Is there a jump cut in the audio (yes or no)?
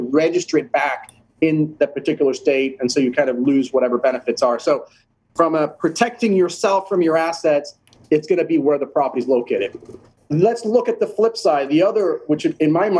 no